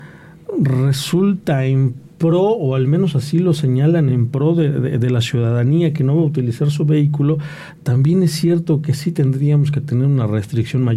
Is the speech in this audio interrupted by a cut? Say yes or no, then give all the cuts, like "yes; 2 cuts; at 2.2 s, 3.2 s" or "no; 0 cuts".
no; 0 cuts